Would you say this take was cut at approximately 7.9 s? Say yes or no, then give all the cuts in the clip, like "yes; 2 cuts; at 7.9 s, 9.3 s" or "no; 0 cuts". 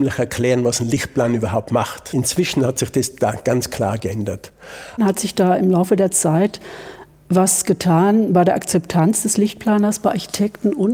no; 2 cuts; at 2.1 s, 5.0 s